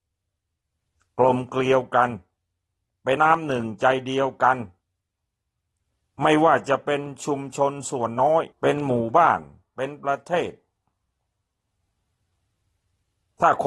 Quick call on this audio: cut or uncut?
cut